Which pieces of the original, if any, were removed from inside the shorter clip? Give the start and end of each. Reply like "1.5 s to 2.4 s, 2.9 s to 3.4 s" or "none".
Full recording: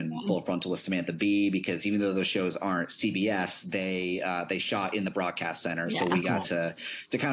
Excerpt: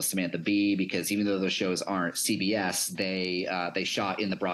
none